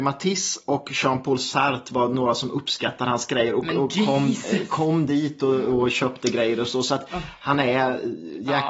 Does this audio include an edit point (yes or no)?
no